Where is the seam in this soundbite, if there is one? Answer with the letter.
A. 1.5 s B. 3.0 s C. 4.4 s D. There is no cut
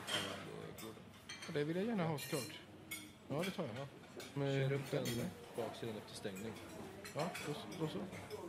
C